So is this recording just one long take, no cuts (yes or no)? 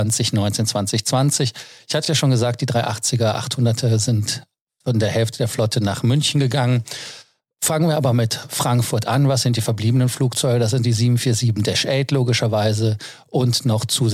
yes